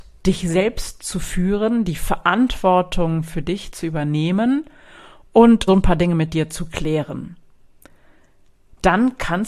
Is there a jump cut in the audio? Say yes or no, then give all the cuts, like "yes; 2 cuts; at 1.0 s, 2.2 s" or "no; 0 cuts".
yes; 1 cut; at 5.7 s